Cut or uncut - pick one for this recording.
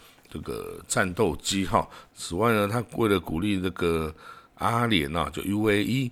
cut